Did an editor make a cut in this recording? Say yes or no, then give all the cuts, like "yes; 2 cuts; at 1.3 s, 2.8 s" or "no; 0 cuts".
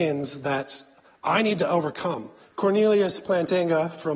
yes; 1 cut; at 2.4 s